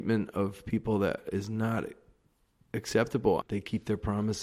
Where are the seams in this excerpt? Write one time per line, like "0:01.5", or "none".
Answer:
0:03.4